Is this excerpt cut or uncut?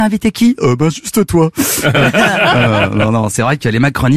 uncut